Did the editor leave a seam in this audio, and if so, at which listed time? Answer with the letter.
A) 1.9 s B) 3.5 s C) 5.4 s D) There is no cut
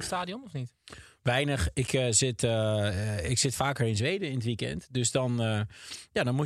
D